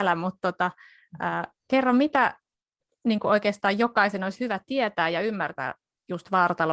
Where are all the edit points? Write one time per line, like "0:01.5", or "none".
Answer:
none